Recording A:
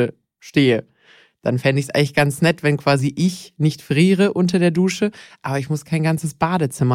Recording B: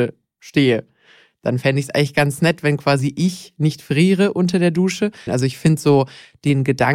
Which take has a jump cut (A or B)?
B